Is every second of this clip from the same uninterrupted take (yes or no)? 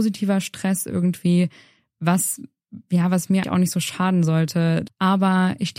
no